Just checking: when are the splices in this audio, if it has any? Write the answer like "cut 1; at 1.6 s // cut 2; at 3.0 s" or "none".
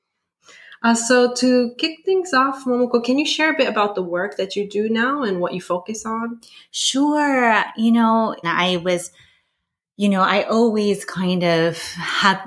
cut 1; at 8.4 s